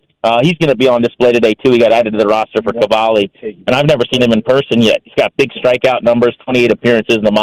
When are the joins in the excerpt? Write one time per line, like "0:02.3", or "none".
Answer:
none